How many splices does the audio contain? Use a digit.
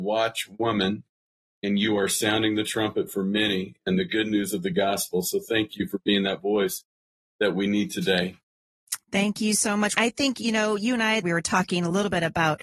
2